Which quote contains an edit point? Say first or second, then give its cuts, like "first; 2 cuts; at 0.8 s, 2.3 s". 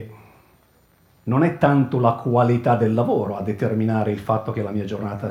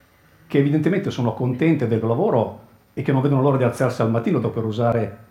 second; 2 cuts; at 2.0 s, 4.4 s